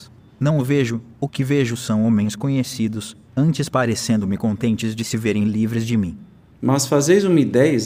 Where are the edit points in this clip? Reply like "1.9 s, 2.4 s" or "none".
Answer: 3.3 s